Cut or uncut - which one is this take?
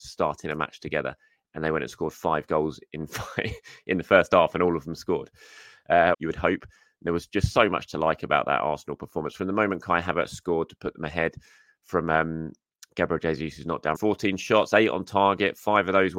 cut